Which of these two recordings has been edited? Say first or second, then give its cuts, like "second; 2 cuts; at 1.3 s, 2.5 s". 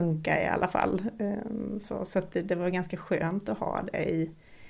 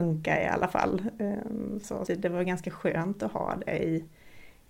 second; 1 cut; at 2.1 s